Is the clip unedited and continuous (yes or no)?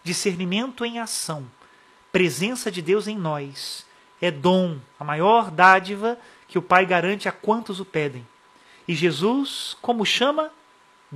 yes